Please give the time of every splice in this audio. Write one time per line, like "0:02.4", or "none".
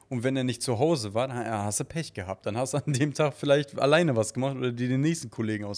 none